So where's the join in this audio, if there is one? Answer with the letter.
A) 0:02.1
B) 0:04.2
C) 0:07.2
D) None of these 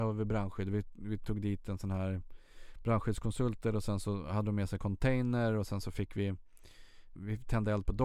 C